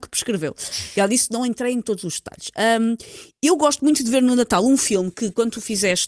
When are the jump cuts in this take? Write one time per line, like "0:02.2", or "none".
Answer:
none